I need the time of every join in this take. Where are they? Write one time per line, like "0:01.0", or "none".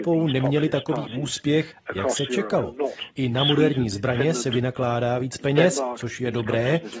0:03.1